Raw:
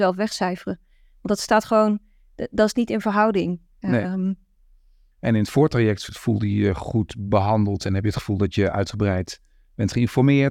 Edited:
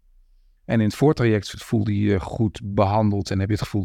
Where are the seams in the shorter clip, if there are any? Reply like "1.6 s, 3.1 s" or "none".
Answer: none